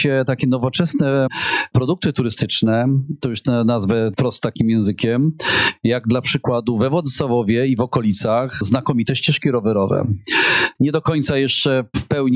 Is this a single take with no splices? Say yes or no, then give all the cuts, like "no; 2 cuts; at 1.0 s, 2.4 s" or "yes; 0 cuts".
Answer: no; 1 cut; at 10.8 s